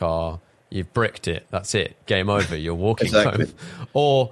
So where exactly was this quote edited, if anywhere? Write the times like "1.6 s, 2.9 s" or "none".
none